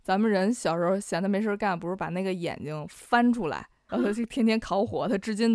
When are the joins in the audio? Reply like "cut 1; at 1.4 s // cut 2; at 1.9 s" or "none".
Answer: cut 1; at 3.9 s